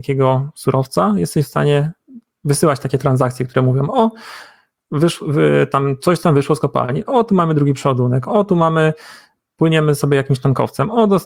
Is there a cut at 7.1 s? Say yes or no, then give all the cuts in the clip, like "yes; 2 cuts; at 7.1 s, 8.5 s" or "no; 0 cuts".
yes; 1 cut; at 7.1 s